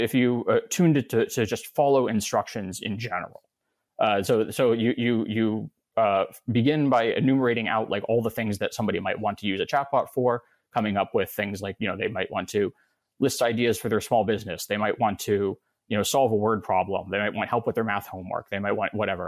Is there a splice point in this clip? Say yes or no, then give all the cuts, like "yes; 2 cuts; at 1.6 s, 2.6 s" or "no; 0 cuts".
no; 0 cuts